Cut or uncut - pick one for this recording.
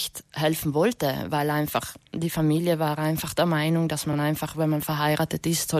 uncut